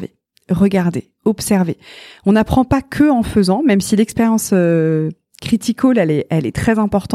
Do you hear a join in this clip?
no; 0 cuts

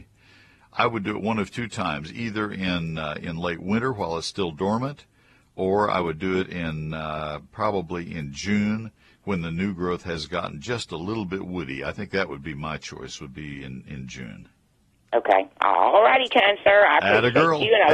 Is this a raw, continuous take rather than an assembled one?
yes; 0 cuts

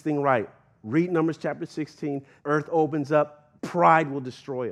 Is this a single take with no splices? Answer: no; 2 cuts; at 2.4 s, 3.6 s

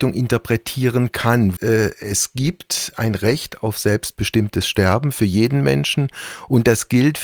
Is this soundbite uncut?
no; 1 cut; at 1.6 s

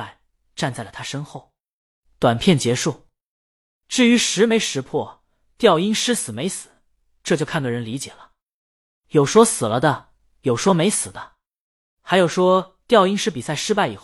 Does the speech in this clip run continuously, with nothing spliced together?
yes; 0 cuts

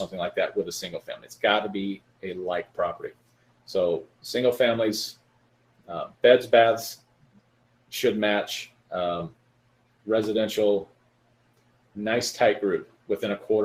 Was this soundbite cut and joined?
no; 0 cuts

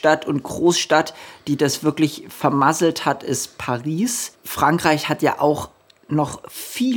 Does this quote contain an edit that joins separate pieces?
yes; 1 cut; at 4.3 s

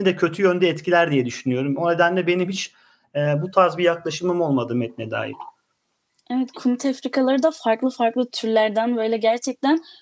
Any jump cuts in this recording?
no; 0 cuts

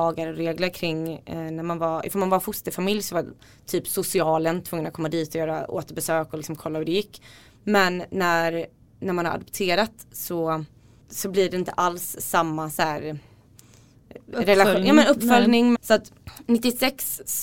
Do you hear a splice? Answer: yes; 1 cut; at 15.7 s

